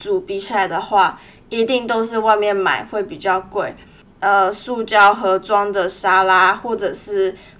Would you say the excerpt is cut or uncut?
cut